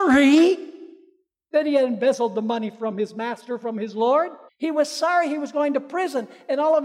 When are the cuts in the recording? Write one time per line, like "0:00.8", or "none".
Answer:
0:04.5